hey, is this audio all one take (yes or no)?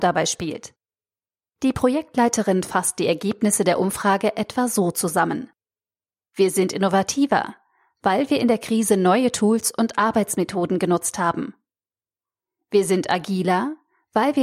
yes